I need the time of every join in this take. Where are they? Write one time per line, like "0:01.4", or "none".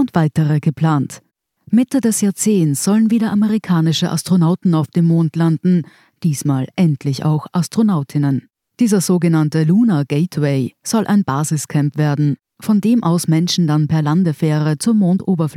0:01.6
0:08.7